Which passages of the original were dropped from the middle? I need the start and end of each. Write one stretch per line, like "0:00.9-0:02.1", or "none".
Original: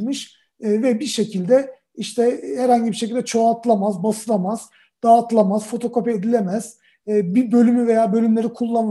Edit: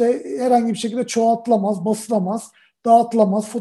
none